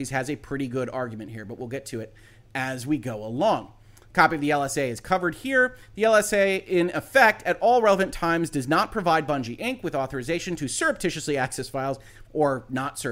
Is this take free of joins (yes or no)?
yes